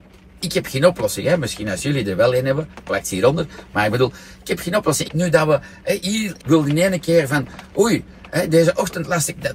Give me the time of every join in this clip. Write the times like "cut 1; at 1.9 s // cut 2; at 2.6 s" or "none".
cut 1; at 5.0 s // cut 2; at 6.4 s